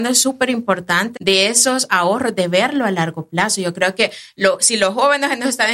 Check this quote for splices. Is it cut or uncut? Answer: cut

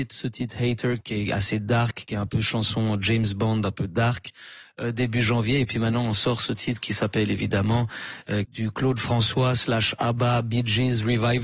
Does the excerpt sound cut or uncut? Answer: cut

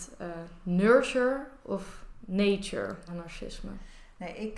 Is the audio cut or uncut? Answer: cut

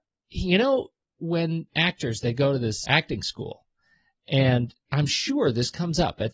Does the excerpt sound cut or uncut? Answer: cut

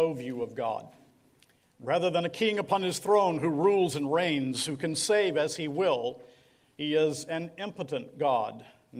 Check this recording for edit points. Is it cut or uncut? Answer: uncut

